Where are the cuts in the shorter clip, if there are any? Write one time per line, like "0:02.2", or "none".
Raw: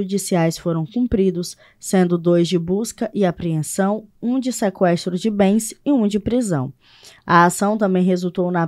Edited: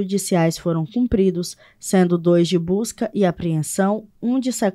none